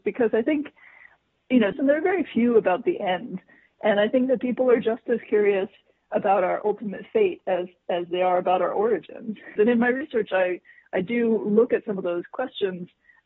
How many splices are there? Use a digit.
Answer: 2